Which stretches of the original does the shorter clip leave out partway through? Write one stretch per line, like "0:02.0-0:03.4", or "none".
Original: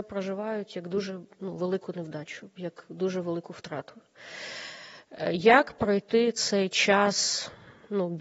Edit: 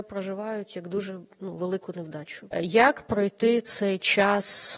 0:02.5-0:05.2

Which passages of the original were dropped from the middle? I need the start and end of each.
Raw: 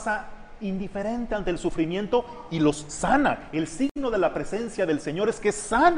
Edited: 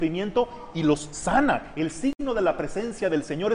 none

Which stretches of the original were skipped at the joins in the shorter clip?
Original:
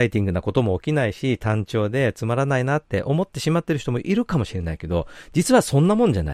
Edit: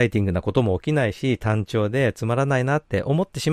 none

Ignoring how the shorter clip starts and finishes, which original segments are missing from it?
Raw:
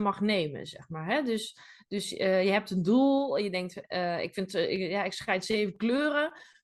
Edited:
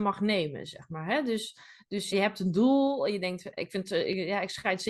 0:02.1-0:02.4
0:03.9-0:04.2

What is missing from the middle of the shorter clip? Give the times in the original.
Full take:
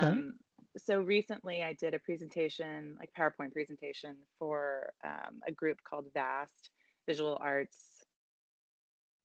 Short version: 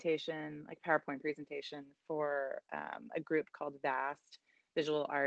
none

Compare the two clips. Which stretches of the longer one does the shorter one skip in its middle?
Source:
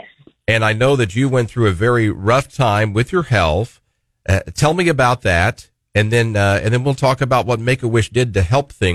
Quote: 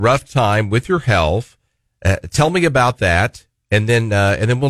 none

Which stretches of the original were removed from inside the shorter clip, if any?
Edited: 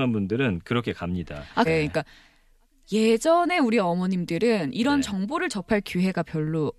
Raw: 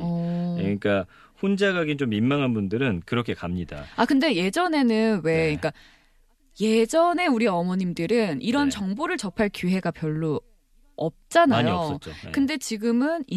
0:04.1-0:05.3

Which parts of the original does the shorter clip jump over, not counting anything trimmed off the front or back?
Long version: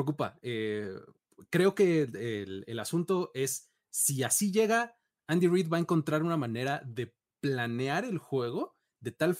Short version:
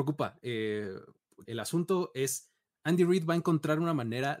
0:01.4-0:02.6
0:03.9-0:05.1

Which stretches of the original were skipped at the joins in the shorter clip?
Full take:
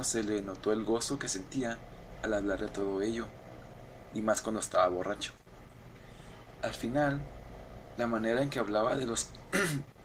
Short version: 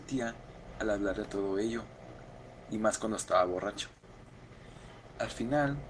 none

